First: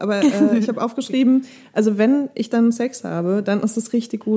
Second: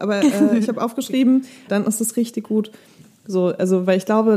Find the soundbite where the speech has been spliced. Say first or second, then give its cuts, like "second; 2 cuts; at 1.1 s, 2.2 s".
second; 1 cut; at 1.7 s